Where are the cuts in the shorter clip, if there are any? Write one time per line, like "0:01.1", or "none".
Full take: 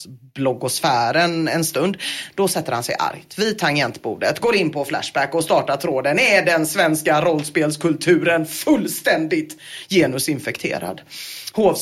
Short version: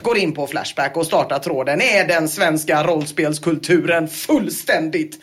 none